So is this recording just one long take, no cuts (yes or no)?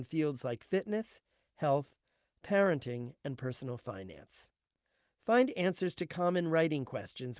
yes